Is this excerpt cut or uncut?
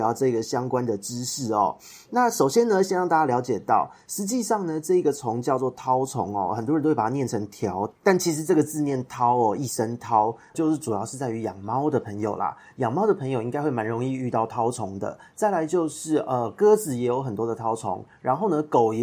cut